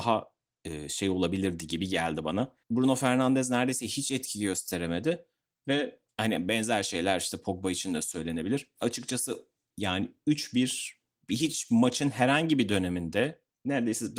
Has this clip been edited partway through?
yes; 1 cut; at 2.6 s

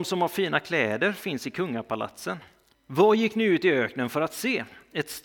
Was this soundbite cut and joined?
yes; 1 cut; at 2.7 s

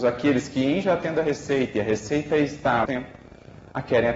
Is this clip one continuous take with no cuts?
no; 1 cut; at 2.8 s

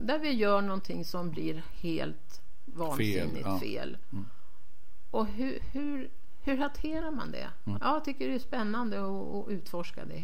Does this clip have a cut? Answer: yes; 1 cut; at 7.8 s

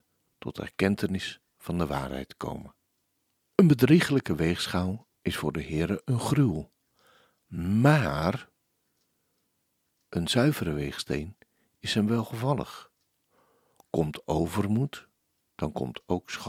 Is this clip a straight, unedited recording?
no; 1 cut; at 3.4 s

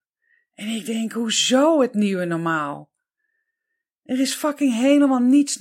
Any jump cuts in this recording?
no; 0 cuts

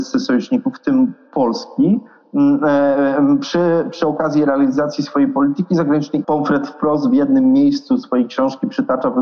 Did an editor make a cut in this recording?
yes; 1 cut; at 6.2 s

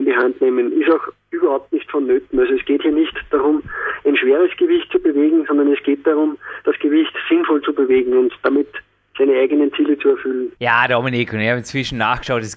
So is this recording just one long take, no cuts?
no; 1 cut; at 10.6 s

